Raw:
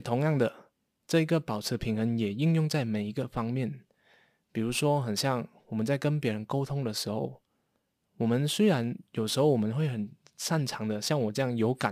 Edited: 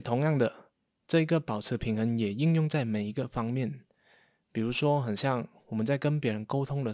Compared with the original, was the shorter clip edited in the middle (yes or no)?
no